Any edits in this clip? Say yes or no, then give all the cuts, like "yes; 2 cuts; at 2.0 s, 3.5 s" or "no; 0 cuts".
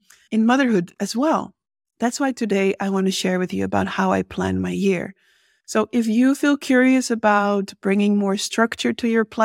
no; 0 cuts